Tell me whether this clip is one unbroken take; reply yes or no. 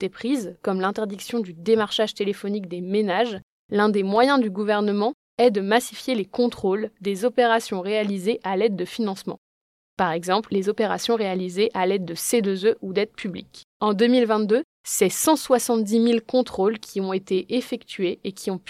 no